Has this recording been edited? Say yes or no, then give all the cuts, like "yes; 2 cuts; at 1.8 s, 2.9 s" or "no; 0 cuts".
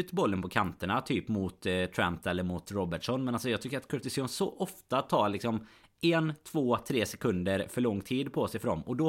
no; 0 cuts